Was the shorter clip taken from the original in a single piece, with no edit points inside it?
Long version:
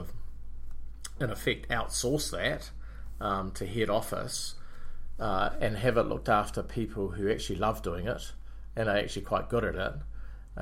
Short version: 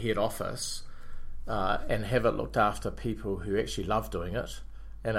yes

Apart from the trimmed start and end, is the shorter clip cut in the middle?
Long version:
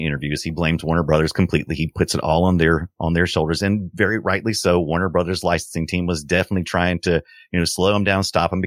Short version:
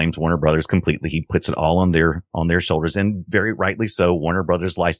no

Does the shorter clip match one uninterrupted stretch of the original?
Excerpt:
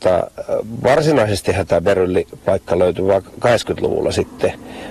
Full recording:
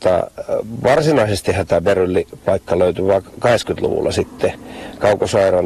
yes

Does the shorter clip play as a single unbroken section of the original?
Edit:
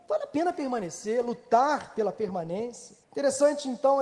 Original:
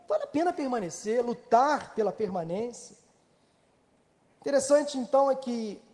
no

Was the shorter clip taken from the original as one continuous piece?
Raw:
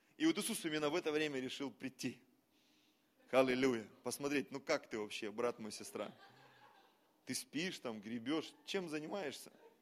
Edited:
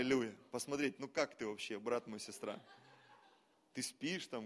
yes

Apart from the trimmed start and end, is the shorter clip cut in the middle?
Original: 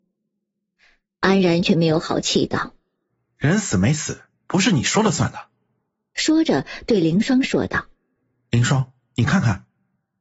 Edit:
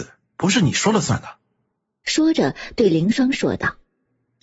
no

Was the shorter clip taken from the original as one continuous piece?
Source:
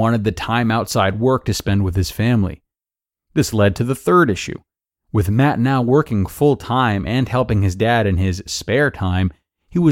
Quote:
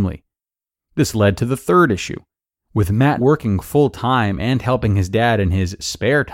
no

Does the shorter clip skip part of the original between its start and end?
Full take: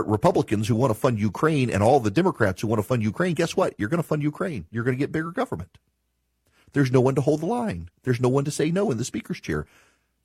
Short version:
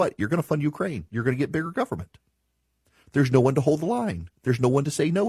no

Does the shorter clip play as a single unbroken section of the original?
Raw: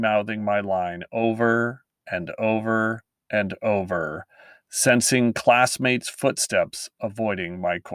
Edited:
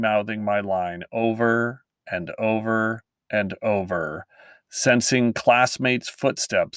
yes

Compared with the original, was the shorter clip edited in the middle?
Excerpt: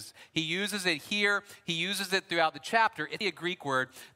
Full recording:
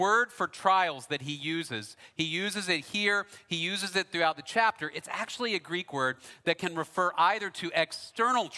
yes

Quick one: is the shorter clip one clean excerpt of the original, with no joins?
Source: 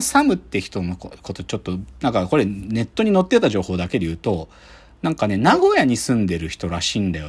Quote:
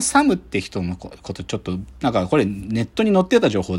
yes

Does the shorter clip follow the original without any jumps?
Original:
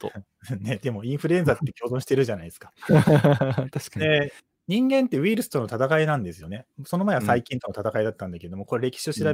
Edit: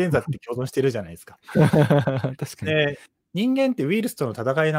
yes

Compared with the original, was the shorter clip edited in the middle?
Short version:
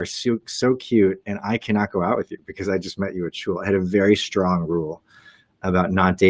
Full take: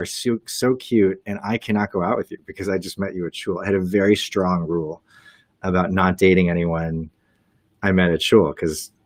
no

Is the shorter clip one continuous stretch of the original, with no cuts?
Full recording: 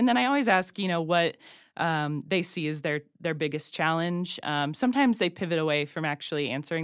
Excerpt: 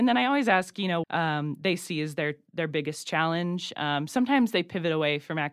no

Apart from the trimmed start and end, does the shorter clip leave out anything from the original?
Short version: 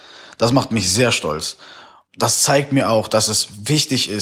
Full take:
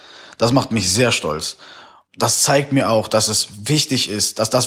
no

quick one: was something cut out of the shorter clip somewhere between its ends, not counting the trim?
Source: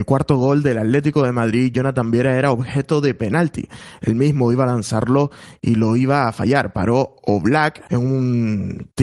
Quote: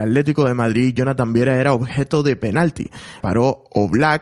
yes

